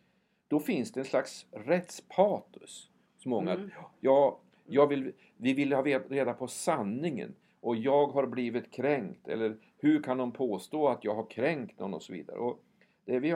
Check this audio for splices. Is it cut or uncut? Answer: uncut